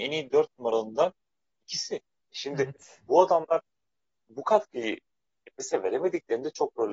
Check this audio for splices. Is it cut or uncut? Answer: cut